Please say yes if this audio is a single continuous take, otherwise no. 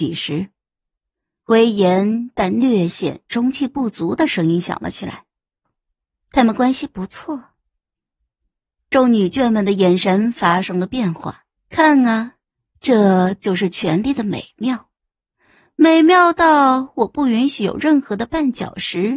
no